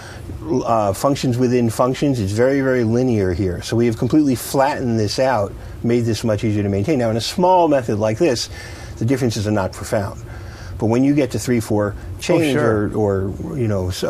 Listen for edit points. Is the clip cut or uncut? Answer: uncut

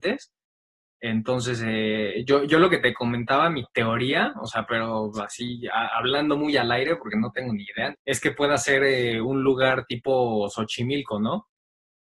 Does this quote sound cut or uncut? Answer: cut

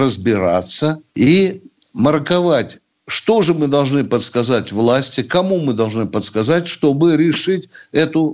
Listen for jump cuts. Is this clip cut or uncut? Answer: cut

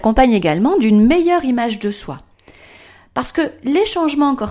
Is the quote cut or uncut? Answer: uncut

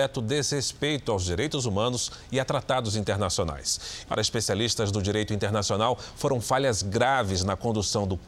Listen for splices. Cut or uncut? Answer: cut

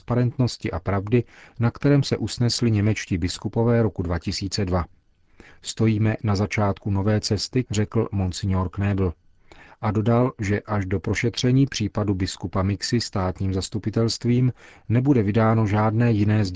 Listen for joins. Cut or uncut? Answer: cut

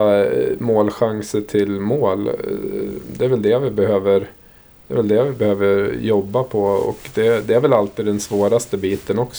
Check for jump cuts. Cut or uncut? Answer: uncut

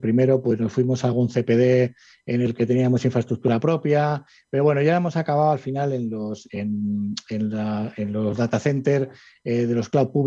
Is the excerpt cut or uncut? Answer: uncut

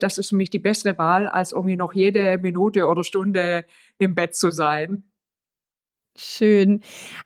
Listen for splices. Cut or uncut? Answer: uncut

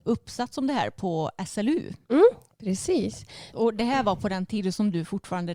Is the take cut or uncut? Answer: cut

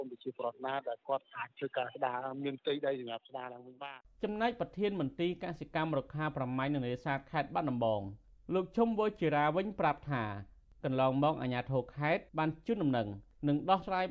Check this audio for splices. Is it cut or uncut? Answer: cut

